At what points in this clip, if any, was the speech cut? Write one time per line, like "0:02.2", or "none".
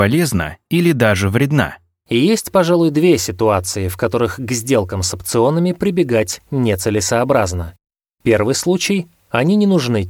none